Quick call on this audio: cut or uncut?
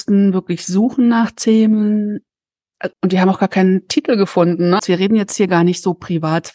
cut